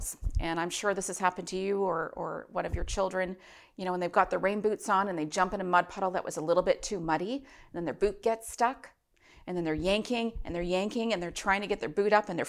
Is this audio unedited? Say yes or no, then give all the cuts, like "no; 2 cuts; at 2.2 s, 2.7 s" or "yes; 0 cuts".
yes; 0 cuts